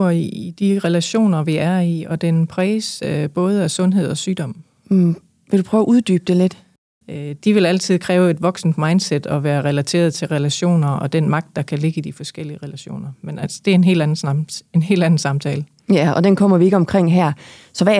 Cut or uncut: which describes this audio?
cut